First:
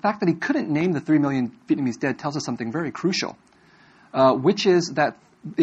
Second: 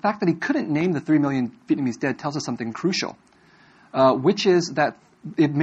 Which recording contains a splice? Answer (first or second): second